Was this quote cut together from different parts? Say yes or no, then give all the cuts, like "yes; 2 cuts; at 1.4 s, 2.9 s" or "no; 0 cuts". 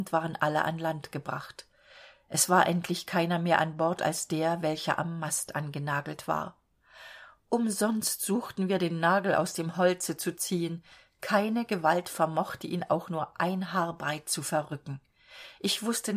no; 0 cuts